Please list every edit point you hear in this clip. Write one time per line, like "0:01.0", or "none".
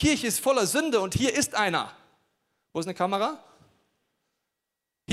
none